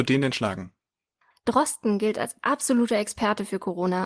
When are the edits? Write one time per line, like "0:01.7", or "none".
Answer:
0:01.3